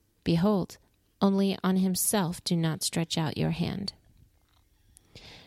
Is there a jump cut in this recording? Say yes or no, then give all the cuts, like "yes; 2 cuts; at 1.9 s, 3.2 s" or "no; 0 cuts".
yes; 1 cut; at 1.1 s